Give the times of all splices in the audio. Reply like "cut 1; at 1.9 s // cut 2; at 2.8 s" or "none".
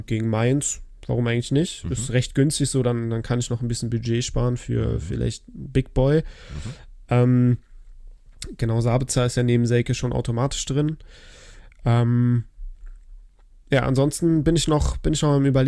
none